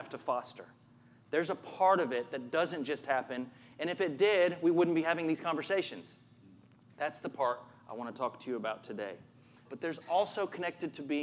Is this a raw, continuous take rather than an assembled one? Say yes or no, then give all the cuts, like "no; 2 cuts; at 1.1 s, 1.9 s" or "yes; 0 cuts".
no; 1 cut; at 9.7 s